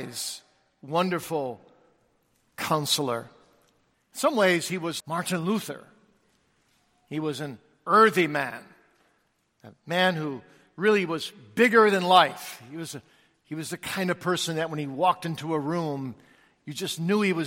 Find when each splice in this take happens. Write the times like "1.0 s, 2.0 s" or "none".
3.9 s, 5.0 s

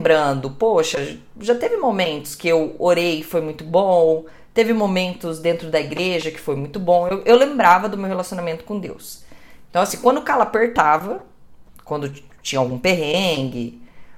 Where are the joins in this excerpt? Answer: none

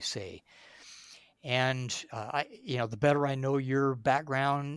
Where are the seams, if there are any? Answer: none

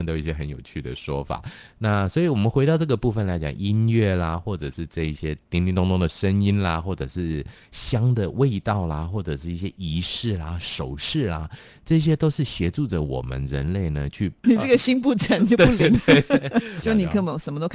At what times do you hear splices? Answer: 14.4 s, 16.8 s

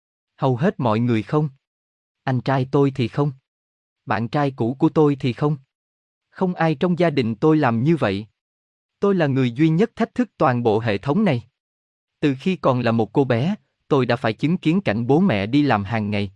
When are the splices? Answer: none

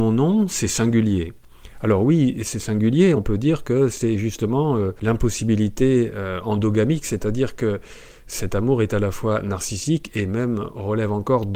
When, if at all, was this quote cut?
none

